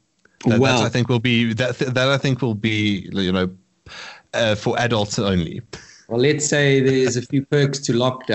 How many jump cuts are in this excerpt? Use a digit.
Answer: 0